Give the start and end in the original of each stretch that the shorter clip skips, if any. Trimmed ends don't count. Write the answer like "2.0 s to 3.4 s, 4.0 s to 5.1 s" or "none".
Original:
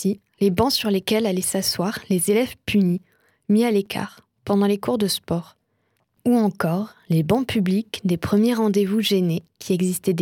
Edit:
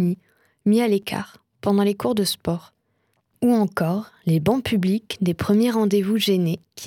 none